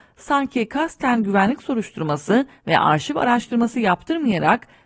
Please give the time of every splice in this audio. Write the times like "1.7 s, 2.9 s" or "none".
none